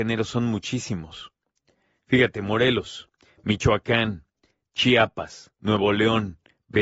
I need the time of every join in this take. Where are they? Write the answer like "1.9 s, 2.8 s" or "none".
none